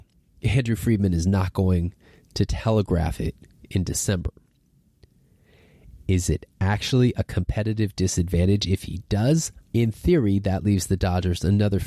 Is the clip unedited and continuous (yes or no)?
no